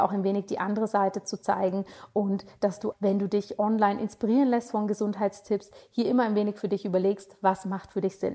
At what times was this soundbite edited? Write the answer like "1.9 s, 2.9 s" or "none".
2.9 s